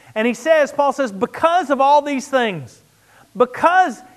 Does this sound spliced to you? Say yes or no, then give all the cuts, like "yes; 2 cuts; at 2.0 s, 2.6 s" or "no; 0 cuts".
yes; 1 cut; at 3.2 s